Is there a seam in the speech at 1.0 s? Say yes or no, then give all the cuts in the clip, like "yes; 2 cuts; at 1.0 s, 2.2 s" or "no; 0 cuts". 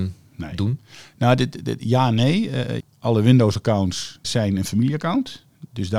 no; 2 cuts; at 2.8 s, 4.2 s